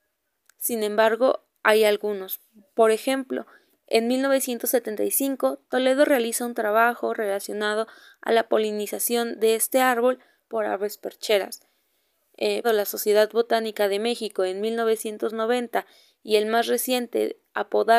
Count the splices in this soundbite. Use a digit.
1